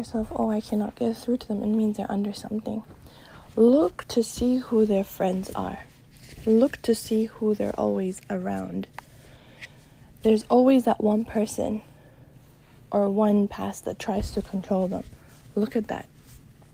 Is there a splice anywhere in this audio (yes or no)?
no